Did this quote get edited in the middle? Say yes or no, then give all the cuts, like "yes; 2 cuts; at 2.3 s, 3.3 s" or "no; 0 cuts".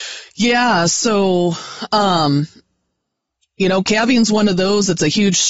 no; 0 cuts